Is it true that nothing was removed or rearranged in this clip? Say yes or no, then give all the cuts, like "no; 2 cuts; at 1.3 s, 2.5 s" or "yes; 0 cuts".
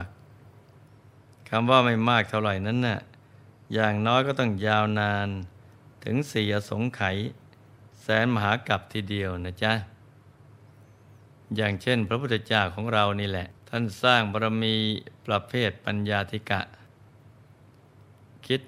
no; 1 cut; at 13.6 s